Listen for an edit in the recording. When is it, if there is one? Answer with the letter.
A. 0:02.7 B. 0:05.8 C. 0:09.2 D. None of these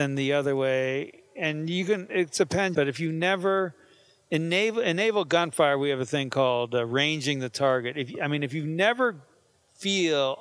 A